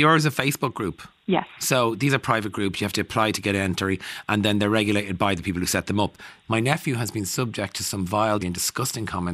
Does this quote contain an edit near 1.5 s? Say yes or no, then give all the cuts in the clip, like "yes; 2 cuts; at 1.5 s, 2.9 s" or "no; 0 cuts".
no; 2 cuts; at 6.4 s, 8.4 s